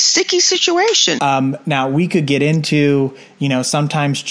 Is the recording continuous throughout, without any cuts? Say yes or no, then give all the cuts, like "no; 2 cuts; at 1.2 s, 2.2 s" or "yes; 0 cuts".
no; 1 cut; at 1.2 s